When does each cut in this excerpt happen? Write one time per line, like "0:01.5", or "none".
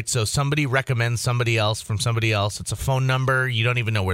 none